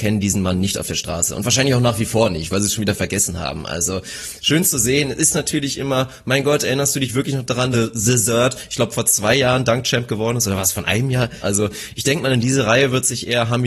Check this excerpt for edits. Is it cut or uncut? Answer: cut